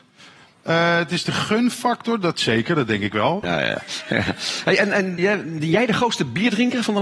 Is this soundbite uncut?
no; 2 cuts; at 3.4 s, 5.2 s

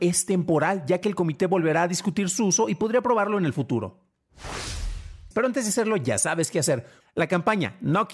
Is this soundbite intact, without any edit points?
no; 2 cuts; at 5.3 s, 7.0 s

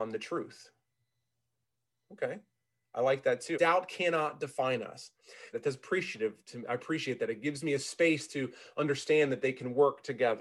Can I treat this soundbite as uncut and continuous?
no; 2 cuts; at 3.5 s, 5.5 s

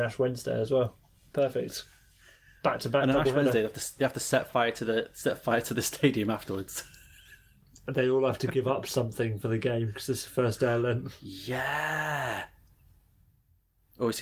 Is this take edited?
no; 0 cuts

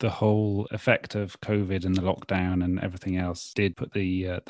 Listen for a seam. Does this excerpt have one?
no; 0 cuts

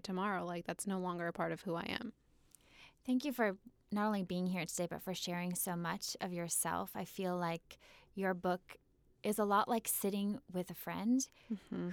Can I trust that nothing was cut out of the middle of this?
yes; 0 cuts

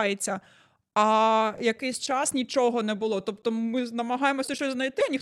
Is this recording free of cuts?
yes; 0 cuts

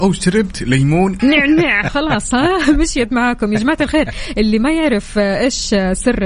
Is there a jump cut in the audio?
yes; 1 cut; at 1.2 s

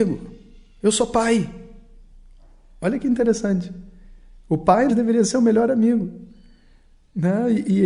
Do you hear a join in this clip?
yes; 1 cut; at 4.9 s

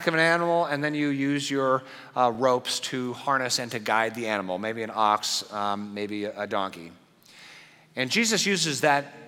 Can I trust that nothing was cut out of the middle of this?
yes; 0 cuts

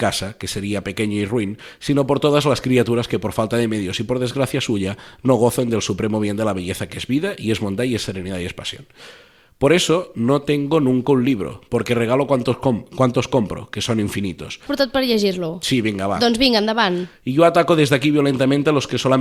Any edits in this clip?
yes; 2 cuts; at 14.7 s, 17.1 s

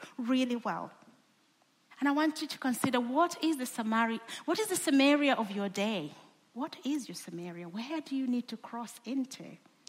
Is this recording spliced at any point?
yes; 1 cut; at 1.9 s

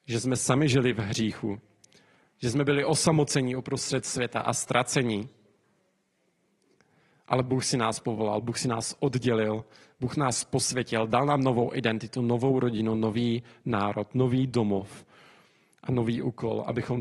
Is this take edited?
no; 0 cuts

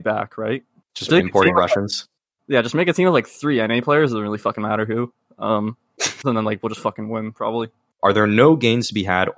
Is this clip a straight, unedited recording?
no; 3 cuts; at 1.1 s, 6.2 s, 8.0 s

